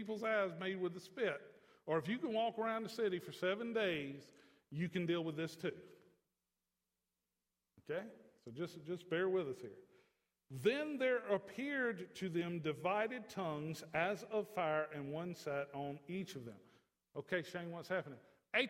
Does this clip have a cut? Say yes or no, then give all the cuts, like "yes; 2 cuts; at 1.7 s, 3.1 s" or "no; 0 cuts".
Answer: no; 0 cuts